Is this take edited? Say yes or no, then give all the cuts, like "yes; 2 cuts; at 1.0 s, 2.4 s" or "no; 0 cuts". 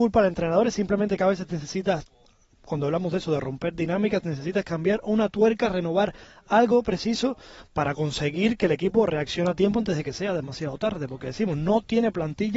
no; 0 cuts